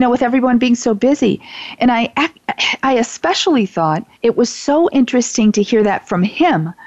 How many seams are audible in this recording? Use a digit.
1